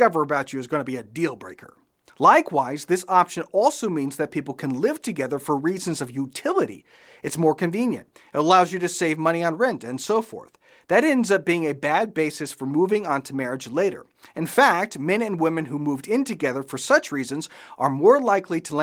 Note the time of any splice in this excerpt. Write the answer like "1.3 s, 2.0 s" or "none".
2.1 s